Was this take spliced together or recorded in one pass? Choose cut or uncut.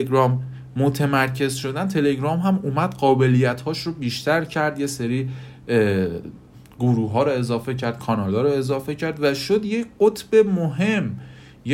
uncut